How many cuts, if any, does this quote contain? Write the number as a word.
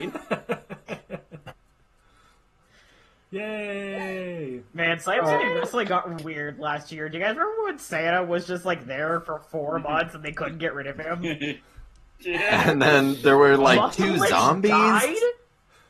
one